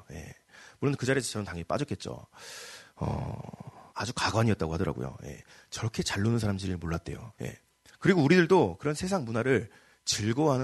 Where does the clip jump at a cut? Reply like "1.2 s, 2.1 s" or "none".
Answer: 3.9 s, 7.3 s